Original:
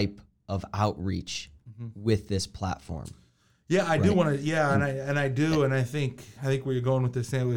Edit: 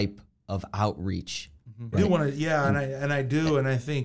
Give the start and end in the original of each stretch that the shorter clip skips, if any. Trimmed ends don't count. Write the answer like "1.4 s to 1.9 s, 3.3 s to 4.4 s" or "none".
1.9 s to 4.0 s